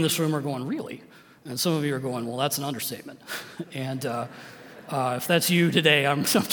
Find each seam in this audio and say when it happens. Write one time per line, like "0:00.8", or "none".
none